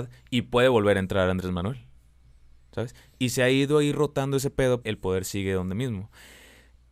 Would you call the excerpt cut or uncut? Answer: cut